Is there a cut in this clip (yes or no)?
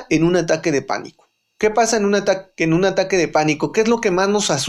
no